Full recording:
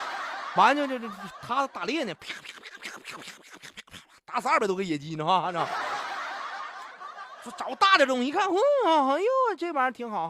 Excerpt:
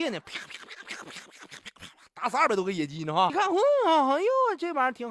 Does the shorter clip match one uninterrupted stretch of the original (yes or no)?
no